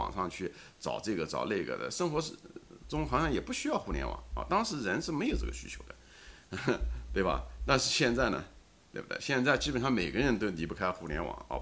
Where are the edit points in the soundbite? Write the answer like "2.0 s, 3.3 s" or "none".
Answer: none